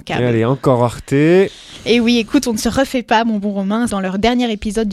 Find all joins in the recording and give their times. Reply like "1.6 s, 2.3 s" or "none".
3.9 s